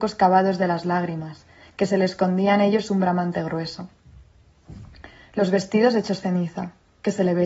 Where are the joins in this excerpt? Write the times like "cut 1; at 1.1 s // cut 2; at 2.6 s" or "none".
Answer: none